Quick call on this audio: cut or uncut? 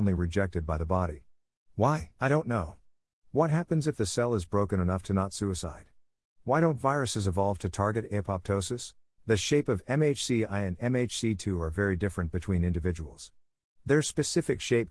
cut